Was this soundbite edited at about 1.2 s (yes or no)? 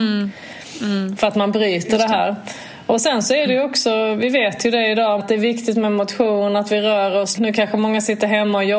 no